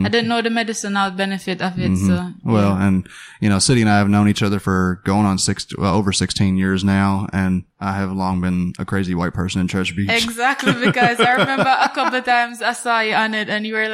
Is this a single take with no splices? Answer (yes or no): yes